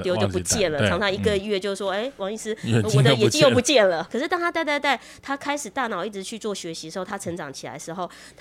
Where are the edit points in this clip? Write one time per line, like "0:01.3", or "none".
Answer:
0:04.1